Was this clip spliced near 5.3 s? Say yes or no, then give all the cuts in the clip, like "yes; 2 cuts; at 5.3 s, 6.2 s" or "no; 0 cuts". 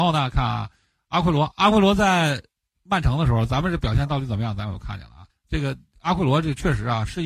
yes; 1 cut; at 5.3 s